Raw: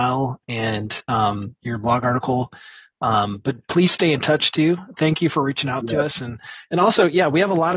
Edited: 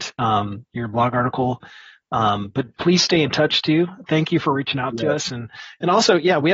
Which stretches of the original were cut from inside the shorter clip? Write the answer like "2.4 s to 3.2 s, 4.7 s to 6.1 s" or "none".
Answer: none